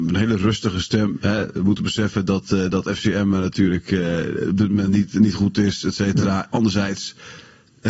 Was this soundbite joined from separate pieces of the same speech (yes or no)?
no